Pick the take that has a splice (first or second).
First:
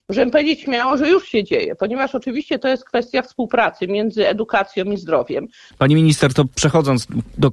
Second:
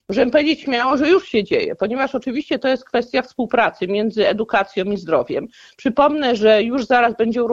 first